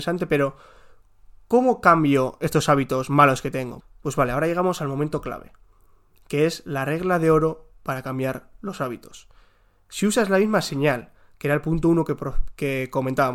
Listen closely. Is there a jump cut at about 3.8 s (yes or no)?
yes